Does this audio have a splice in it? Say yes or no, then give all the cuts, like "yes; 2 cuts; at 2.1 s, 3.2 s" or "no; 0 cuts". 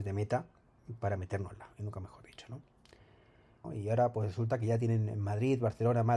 yes; 1 cut; at 3.6 s